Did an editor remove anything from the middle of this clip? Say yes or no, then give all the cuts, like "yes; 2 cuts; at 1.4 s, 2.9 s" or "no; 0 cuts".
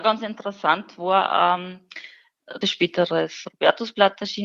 yes; 1 cut; at 2.6 s